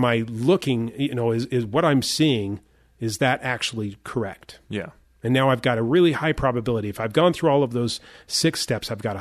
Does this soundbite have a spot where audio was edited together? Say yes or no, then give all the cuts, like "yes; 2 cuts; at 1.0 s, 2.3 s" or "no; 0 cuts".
no; 0 cuts